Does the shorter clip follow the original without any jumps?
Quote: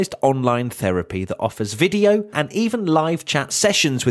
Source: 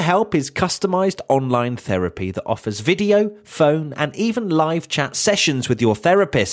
no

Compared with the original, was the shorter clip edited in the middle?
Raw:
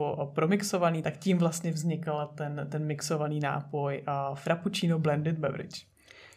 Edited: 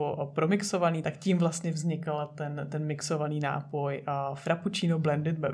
no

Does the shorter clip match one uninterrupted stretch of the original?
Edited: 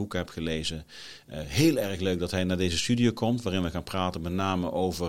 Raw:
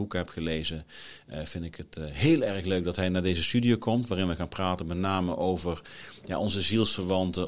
no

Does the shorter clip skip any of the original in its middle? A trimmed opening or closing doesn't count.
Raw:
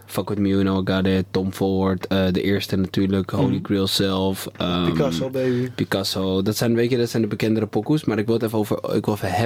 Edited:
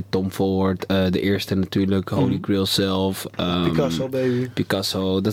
no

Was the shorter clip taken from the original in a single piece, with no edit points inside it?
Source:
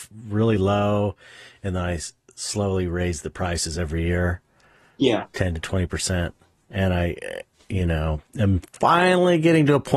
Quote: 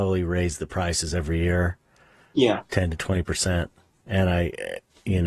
yes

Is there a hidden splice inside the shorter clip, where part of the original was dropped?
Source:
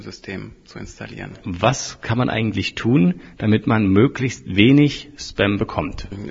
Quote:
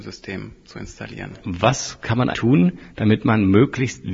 yes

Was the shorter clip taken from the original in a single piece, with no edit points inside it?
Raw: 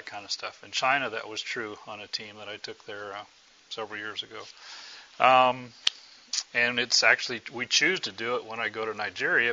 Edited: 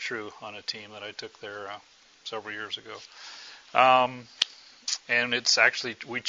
yes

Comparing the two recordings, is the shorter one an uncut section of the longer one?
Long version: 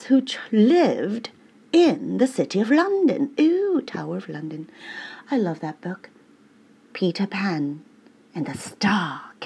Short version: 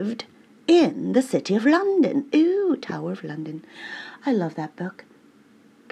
yes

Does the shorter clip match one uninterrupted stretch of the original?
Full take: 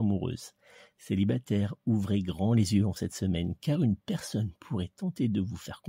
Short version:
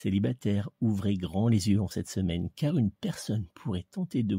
yes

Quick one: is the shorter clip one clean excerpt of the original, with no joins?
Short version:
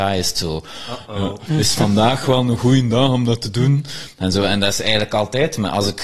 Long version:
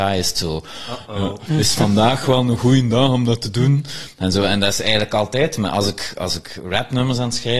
yes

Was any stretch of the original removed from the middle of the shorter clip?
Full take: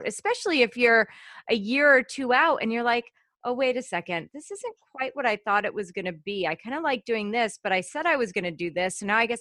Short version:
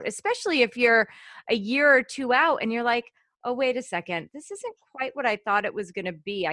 no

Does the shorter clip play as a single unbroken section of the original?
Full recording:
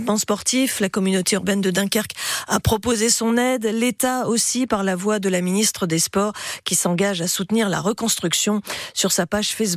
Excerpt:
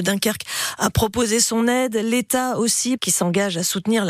no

